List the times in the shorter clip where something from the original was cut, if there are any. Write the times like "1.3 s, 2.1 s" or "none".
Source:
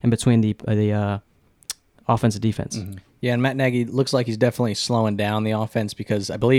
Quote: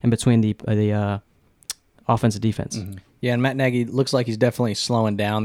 none